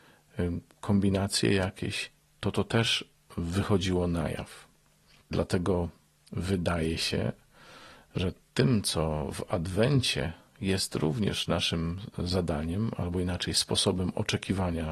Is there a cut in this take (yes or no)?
yes